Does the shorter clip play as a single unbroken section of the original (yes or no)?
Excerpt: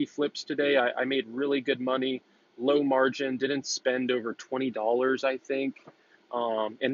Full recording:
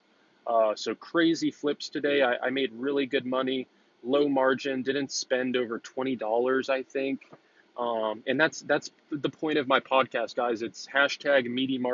yes